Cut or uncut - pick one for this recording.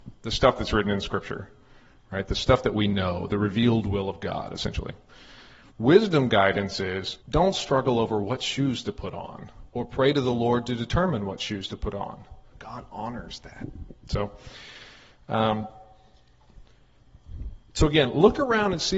cut